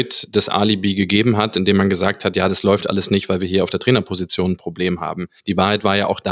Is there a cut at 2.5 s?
no; 1 cut; at 5.4 s

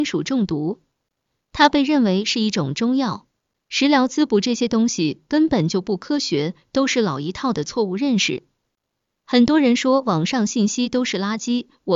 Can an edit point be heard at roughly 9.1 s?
yes; 2 cuts; at 3.5 s, 9.1 s

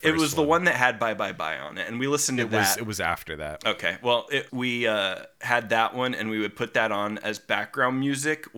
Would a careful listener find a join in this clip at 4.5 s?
yes; 1 cut; at 4.5 s

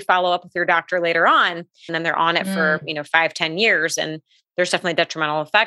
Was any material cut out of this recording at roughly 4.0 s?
no; 1 cut; at 1.9 s

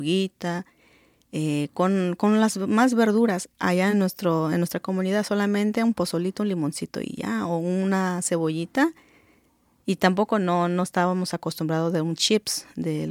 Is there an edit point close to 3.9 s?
no; 0 cuts

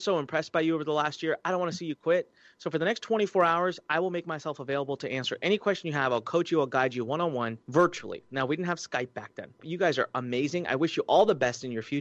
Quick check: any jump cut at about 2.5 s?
no; 2 cuts; at 7.6 s, 9.6 s

